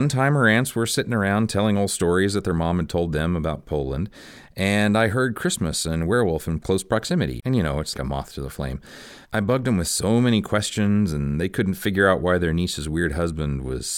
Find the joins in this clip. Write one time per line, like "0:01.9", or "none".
0:07.9

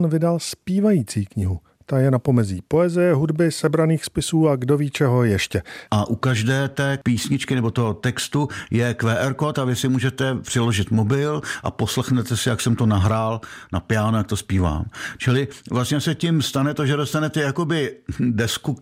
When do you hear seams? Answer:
0:05.9

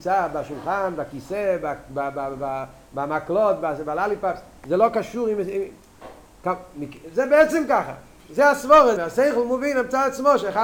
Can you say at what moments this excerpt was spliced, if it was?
0:09.0

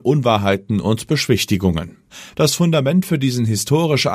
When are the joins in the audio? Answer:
0:02.3

